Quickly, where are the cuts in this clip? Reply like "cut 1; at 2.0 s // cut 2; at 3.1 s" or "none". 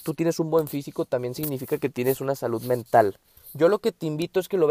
cut 1; at 3.4 s

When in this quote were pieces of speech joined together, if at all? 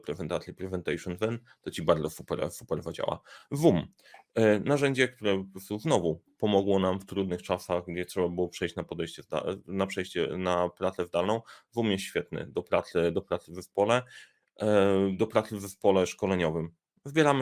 none

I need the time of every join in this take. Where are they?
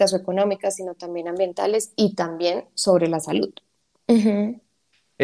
cut 1; at 4.1 s

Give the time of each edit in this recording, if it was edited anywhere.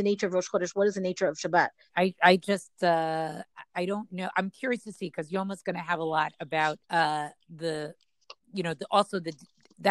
cut 1; at 1.9 s // cut 2; at 6.8 s

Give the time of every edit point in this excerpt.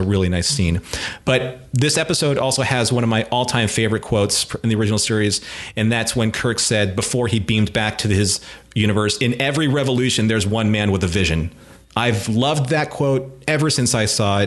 none

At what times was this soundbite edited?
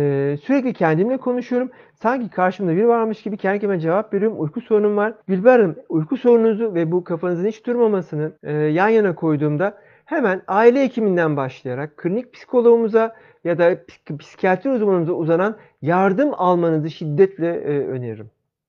cut 1; at 5.2 s // cut 2; at 8.4 s // cut 3; at 16.9 s

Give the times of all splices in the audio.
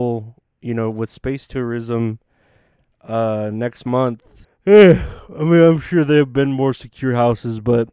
cut 1; at 4.4 s

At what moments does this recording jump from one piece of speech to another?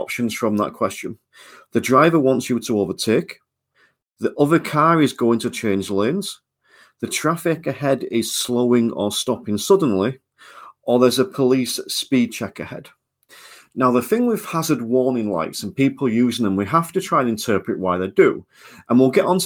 none

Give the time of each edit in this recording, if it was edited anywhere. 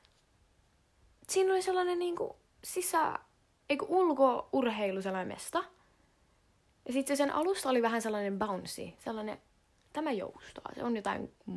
none

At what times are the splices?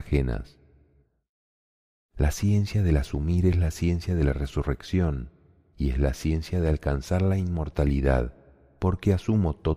none

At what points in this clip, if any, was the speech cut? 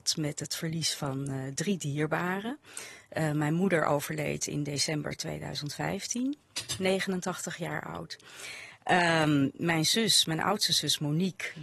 none

